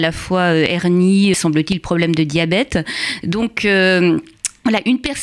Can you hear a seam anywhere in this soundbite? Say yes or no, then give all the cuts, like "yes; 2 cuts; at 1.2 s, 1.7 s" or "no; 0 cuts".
yes; 2 cuts; at 1.3 s, 3.2 s